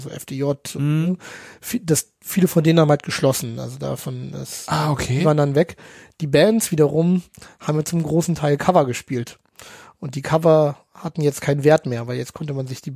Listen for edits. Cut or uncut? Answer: uncut